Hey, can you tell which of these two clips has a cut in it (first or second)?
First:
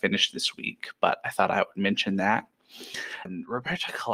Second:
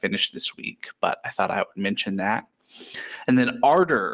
first